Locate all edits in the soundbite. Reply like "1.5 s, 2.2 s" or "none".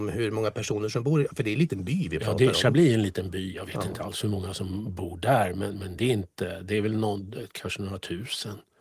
none